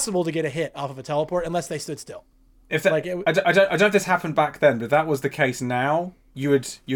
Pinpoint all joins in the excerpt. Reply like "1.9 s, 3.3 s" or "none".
none